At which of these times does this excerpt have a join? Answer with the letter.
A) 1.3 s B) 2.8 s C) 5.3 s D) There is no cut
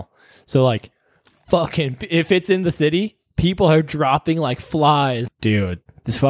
C